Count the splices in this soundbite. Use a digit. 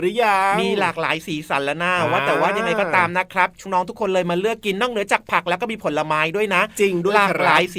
1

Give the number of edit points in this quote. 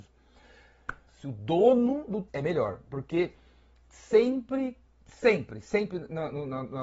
2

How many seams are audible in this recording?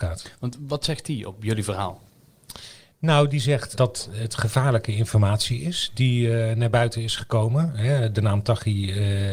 1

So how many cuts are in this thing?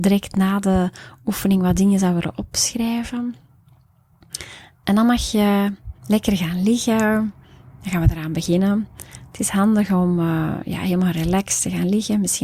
1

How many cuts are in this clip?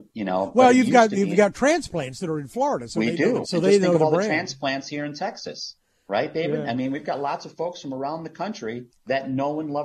1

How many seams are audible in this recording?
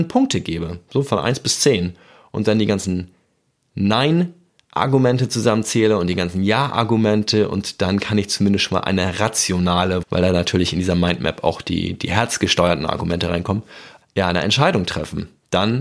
2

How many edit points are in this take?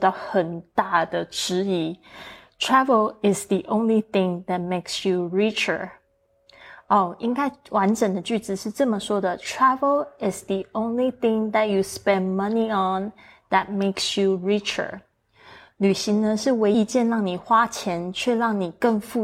1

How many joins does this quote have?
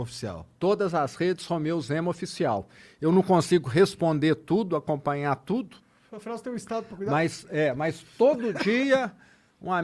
0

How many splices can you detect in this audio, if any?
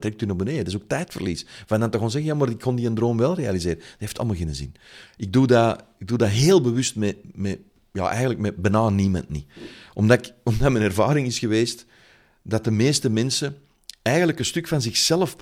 1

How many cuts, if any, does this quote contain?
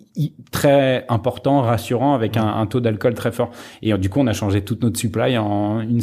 0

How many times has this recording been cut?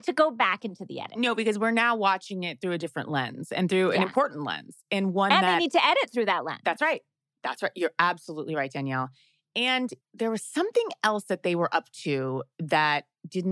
1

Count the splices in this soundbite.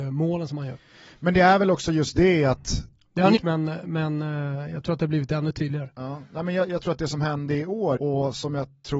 2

